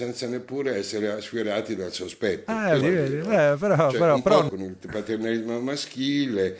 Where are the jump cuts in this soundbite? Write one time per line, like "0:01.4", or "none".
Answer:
0:02.8
0:04.5